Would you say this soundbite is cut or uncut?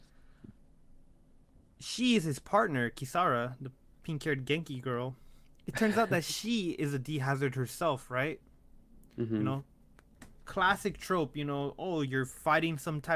cut